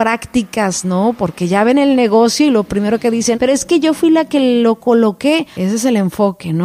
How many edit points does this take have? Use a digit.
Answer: 2